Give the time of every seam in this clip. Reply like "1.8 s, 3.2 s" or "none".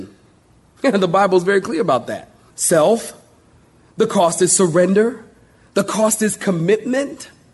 2.5 s